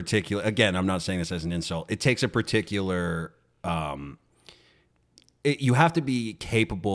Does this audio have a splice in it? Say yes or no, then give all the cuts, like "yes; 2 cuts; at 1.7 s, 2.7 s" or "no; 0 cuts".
no; 0 cuts